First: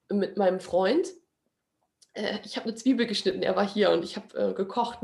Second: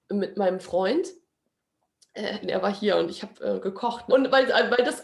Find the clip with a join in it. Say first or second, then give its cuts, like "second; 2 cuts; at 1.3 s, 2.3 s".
second; 2 cuts; at 2.4 s, 4.1 s